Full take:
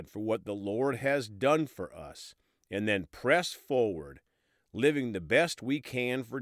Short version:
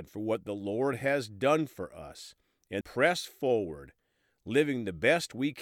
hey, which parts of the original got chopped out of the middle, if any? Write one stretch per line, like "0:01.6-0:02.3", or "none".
0:02.8-0:03.1